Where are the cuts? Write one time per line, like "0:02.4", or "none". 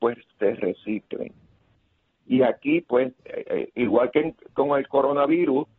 0:02.1
0:03.2